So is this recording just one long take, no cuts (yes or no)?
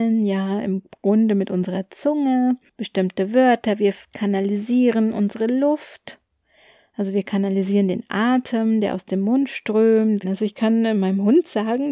no